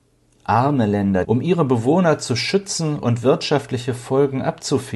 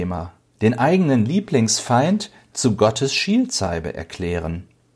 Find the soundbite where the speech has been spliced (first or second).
first